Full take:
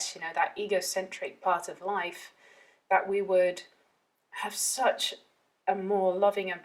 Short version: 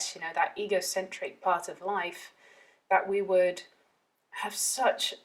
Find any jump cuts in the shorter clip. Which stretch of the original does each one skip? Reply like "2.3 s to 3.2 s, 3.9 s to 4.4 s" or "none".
none